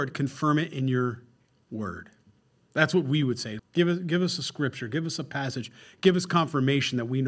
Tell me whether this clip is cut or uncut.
cut